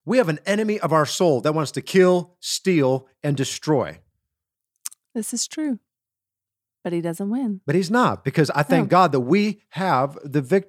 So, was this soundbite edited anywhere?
no; 0 cuts

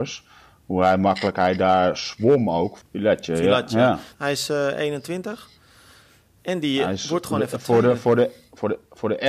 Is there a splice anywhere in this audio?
yes; 2 cuts; at 2.8 s, 4.1 s

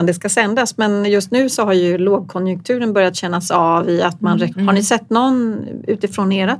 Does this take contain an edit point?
yes; 1 cut; at 4.5 s

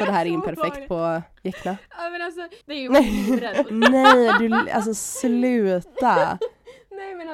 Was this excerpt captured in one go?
no; 2 cuts; at 2.6 s, 3.7 s

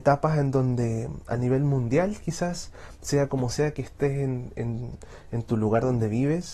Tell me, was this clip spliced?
no; 0 cuts

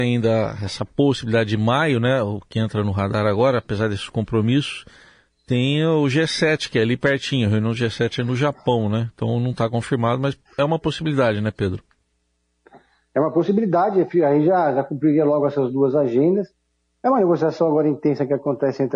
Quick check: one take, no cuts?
yes; 0 cuts

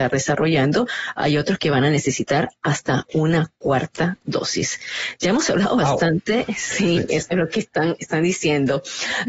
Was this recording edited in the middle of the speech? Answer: no; 0 cuts

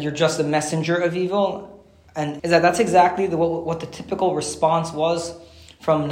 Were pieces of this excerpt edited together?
yes; 1 cut; at 2.4 s

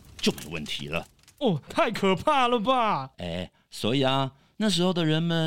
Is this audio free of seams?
no; 2 cuts; at 1.7 s, 3.1 s

